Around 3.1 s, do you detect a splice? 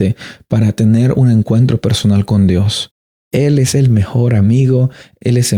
yes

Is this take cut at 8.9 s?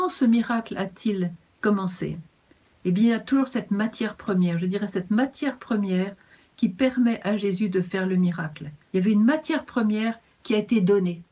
yes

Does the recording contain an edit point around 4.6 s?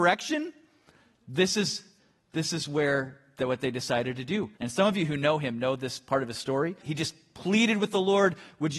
yes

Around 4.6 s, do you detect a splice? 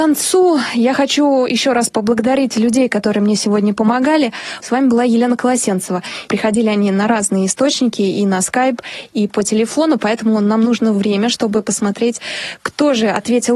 yes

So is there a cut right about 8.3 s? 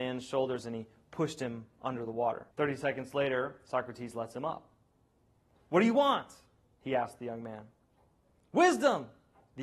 no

